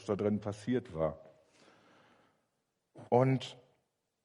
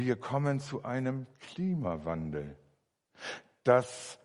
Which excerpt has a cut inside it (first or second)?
first